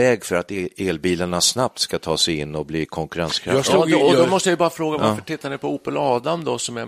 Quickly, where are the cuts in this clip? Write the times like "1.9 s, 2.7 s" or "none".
4.0 s